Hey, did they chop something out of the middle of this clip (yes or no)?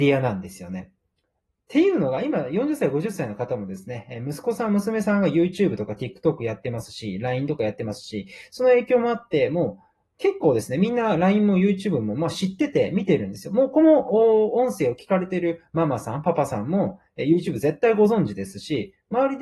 no